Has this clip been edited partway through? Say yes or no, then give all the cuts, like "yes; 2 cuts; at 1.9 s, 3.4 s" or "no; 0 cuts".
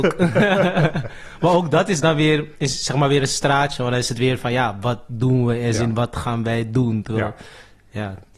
no; 0 cuts